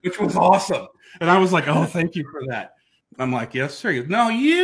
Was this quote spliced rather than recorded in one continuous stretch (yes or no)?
yes